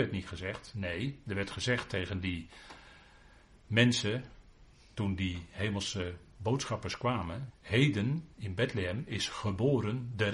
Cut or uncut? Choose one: cut